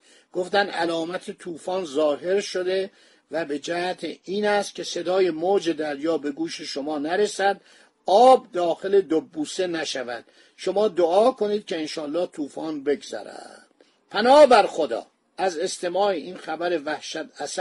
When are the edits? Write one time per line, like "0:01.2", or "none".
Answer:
none